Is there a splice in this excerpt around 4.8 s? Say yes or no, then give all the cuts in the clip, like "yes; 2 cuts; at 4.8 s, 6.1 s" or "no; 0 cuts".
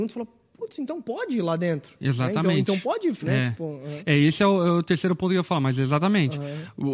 no; 1 cut; at 3.2 s